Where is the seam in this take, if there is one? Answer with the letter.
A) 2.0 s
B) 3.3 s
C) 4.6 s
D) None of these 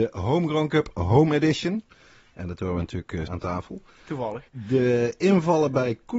B